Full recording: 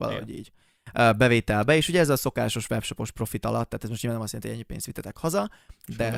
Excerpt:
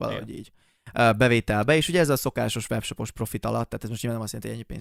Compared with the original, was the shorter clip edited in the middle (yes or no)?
no